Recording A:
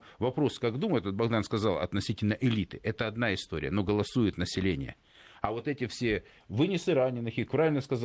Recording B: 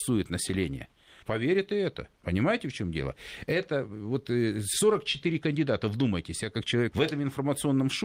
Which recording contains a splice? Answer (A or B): B